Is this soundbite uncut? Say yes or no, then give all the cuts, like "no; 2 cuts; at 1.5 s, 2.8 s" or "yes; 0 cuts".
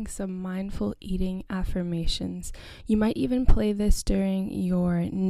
yes; 0 cuts